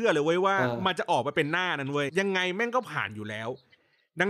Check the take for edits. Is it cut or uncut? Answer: cut